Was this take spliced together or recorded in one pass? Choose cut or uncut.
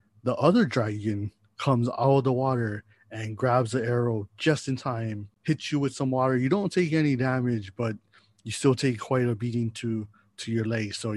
uncut